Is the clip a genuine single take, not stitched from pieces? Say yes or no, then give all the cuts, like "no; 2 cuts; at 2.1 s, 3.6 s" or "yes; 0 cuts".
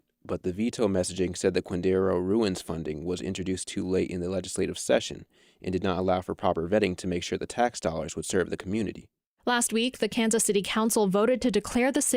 yes; 0 cuts